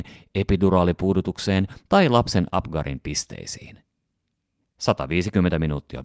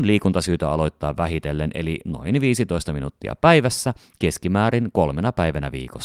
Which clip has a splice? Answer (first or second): first